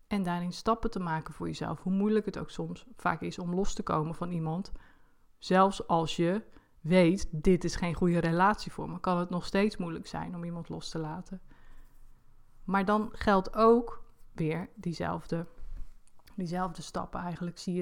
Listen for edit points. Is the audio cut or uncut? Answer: uncut